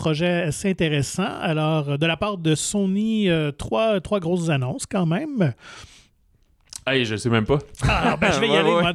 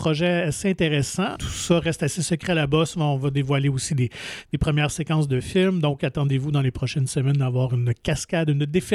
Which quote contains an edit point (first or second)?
second